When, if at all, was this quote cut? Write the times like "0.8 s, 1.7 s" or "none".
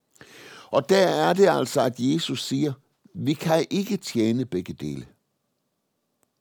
none